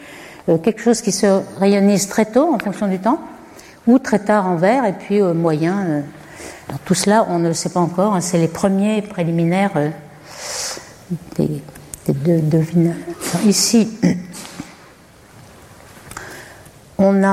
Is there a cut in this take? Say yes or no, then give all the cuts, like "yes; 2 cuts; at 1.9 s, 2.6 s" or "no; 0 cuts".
no; 0 cuts